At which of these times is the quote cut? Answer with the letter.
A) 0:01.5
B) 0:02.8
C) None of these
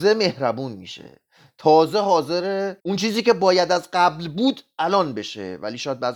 B